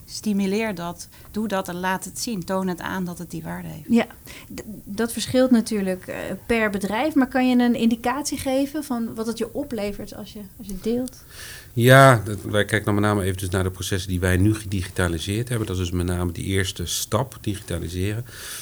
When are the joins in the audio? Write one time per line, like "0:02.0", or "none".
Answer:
0:05.0
0:12.4

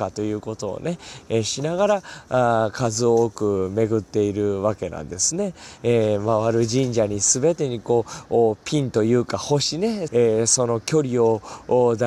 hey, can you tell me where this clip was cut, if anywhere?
0:05.8
0:10.1

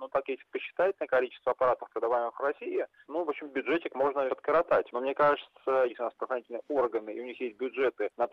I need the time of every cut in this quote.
0:04.3
0:05.9

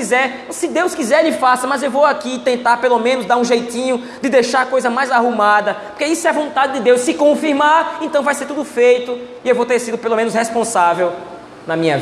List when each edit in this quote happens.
none

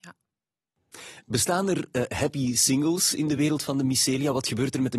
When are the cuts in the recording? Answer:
none

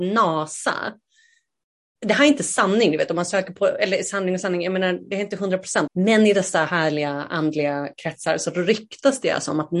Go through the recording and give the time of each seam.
0:05.9

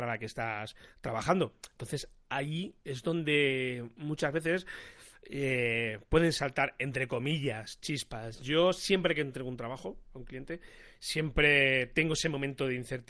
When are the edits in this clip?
none

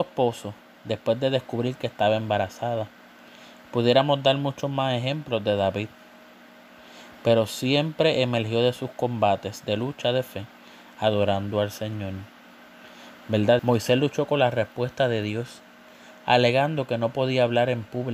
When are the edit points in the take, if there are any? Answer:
0:13.6

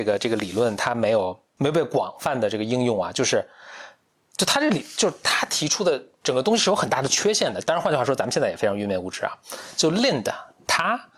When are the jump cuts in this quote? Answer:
0:07.6

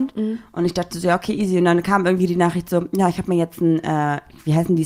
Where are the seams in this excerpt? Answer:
none

